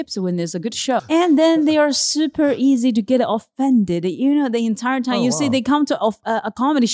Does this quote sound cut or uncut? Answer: cut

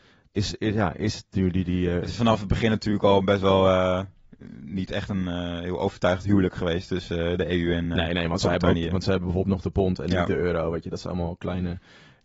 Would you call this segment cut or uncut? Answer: uncut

